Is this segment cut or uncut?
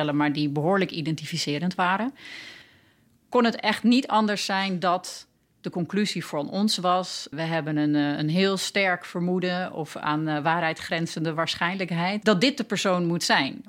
cut